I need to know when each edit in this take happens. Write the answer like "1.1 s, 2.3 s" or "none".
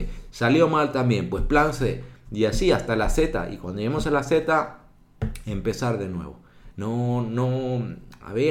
6.7 s